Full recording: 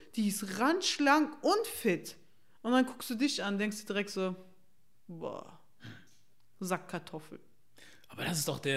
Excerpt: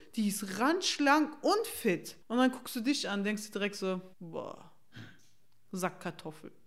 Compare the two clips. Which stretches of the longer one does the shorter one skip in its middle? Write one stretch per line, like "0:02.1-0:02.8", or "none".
0:02.2-0:02.6
0:04.5-0:05.0